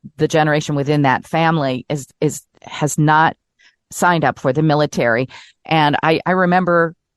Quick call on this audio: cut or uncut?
cut